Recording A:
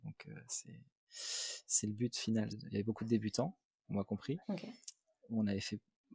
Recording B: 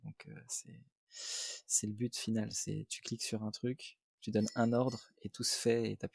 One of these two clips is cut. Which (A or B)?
A